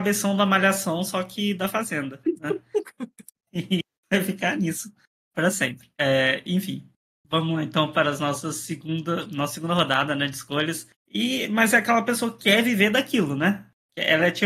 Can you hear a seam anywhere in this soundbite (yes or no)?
yes